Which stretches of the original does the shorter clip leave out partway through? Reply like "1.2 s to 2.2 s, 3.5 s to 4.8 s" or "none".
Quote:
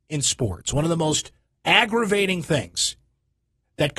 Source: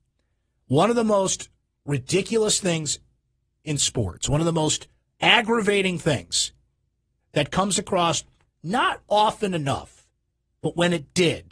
none